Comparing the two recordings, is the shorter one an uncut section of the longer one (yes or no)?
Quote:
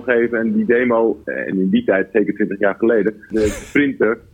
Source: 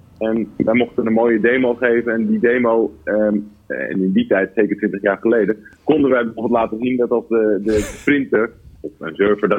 no